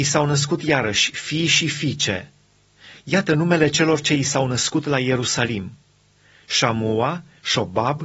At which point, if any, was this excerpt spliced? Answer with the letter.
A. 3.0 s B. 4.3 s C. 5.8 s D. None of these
D